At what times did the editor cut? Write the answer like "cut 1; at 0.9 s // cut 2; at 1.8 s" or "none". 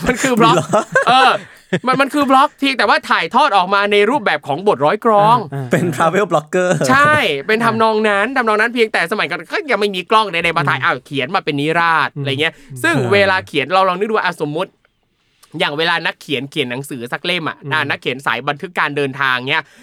none